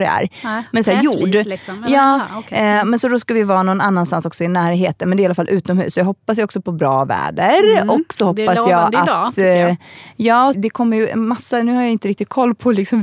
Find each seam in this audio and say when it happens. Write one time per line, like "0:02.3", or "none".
0:10.5